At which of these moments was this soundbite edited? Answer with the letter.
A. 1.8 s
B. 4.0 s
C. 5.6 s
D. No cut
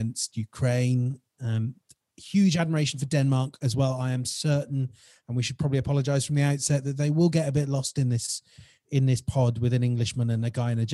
D